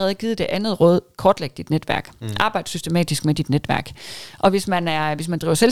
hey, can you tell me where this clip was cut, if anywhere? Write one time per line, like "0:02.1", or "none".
none